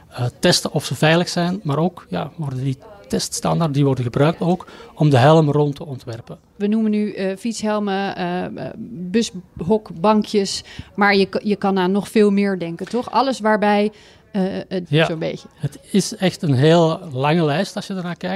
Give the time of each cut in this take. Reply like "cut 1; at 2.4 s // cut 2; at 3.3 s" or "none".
cut 1; at 14.8 s